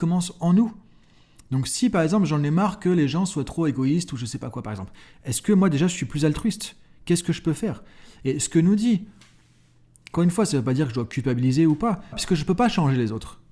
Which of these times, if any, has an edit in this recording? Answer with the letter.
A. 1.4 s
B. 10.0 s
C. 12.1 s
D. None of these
C